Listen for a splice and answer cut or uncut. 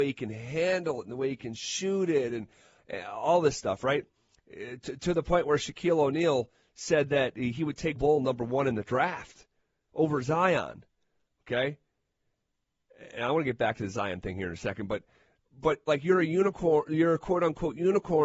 cut